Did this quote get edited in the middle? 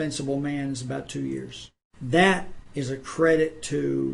yes; 1 cut; at 2.7 s

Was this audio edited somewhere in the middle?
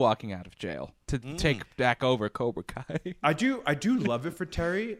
no; 0 cuts

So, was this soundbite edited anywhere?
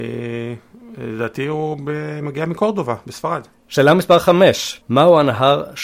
yes; 2 cuts; at 3.5 s, 4.8 s

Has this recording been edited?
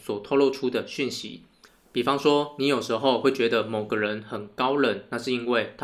no; 0 cuts

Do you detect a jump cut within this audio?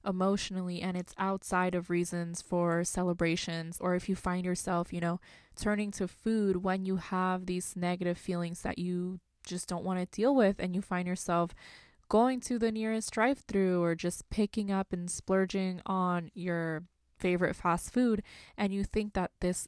yes; 1 cut; at 3.8 s

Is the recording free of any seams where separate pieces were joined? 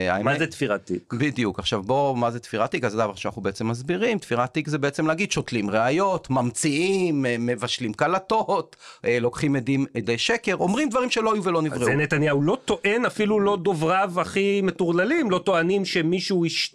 yes; 0 cuts

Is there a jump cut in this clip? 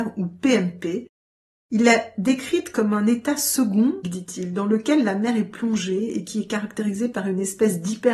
yes; 1 cut; at 4.0 s

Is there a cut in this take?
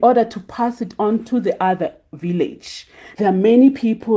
yes; 1 cut; at 3.1 s

